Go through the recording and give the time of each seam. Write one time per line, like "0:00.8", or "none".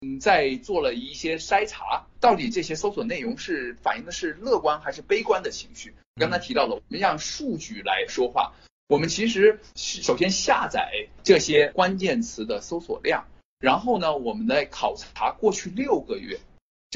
0:02.2